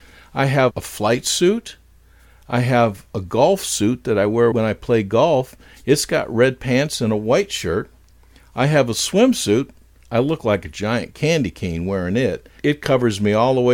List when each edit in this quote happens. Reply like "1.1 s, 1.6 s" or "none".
none